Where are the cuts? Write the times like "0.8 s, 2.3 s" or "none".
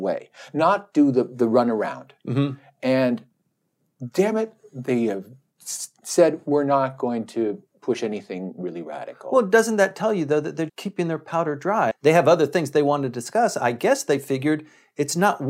10.7 s, 11.9 s